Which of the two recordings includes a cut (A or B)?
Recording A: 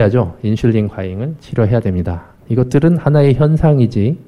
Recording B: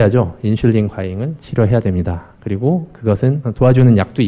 A